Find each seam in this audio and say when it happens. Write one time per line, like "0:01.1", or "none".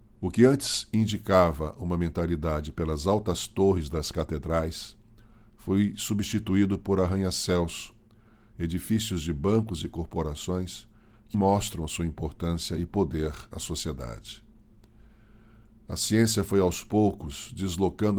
0:11.3